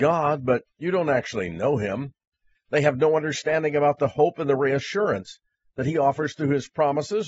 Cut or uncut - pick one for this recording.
cut